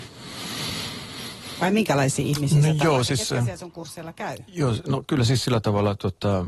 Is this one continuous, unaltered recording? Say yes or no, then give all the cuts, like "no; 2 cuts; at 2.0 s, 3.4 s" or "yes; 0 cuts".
yes; 0 cuts